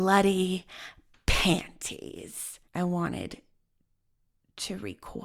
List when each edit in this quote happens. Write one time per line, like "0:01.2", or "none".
0:02.6